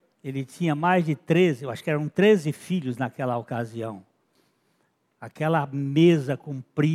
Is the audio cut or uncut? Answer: uncut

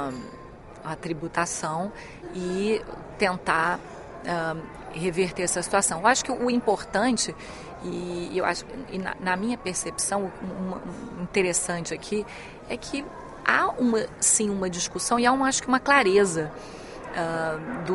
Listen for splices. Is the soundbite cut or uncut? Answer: uncut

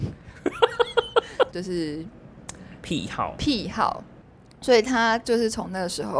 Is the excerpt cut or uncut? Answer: cut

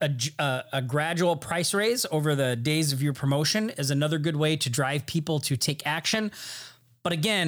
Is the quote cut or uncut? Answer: uncut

